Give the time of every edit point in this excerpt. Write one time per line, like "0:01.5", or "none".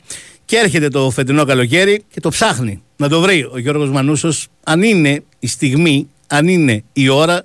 0:02.1